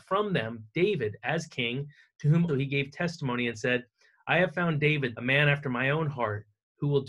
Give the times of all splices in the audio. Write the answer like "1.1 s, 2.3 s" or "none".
2.5 s, 5.1 s